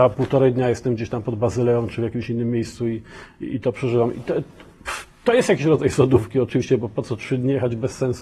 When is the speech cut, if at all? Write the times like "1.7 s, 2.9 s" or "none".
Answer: none